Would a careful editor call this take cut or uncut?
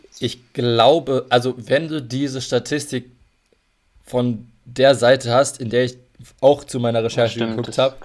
uncut